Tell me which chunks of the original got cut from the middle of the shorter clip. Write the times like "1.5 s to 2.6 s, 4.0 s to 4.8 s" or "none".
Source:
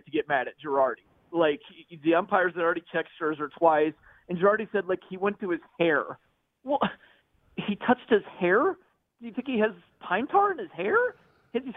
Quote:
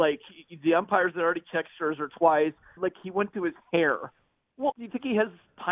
4.2 s to 4.8 s, 6.8 s to 9.2 s